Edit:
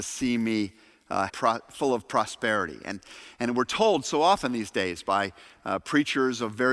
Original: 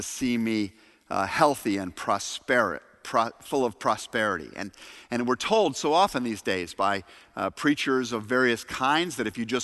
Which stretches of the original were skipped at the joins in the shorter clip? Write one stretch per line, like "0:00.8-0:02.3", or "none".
0:01.3-0:03.0